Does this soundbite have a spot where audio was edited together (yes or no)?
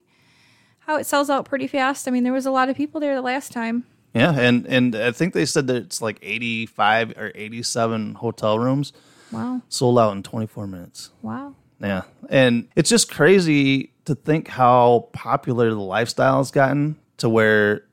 yes